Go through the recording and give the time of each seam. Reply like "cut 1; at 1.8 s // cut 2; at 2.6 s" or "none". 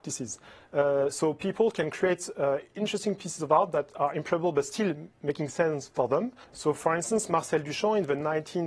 cut 1; at 6.4 s